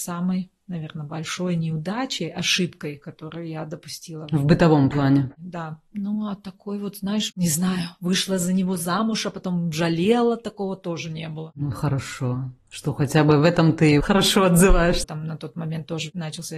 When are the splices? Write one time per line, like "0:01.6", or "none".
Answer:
0:07.3
0:15.0